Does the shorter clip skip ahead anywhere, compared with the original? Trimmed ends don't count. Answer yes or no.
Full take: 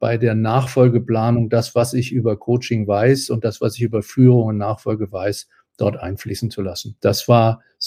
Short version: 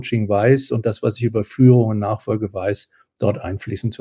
no